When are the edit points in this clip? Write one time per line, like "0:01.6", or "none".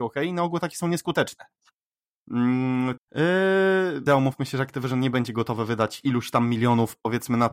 0:03.0
0:04.1